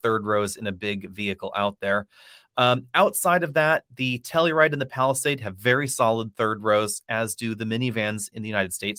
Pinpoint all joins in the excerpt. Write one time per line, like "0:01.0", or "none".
none